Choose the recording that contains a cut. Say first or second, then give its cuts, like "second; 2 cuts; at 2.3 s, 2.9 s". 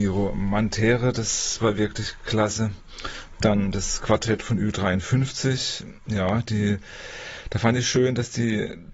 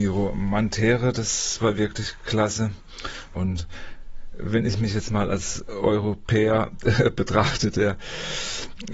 second; 1 cut; at 3.4 s